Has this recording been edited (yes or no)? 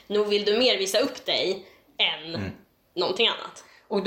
no